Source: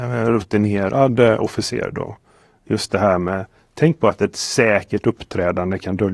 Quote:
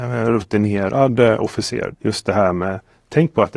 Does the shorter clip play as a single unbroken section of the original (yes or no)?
no